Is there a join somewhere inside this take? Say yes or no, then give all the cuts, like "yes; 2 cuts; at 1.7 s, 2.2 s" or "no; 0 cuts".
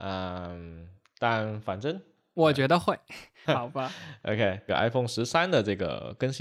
yes; 2 cuts; at 3.4 s, 4.7 s